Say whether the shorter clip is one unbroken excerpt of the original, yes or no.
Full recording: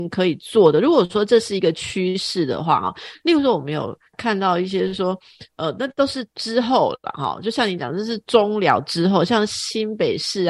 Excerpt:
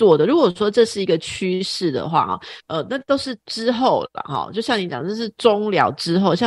no